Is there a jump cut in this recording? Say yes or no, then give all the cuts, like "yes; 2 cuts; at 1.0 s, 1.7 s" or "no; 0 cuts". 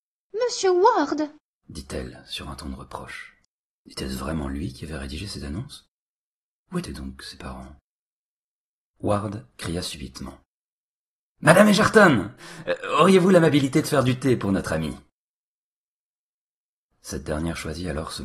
yes; 1 cut; at 3.8 s